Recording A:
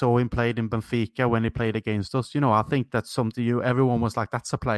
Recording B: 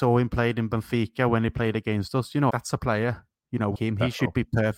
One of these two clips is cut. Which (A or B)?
B